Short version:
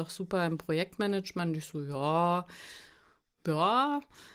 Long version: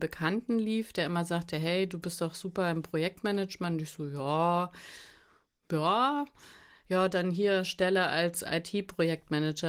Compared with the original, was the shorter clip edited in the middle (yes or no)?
no